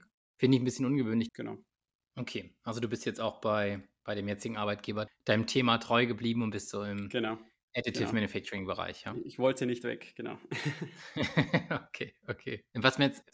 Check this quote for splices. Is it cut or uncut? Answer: cut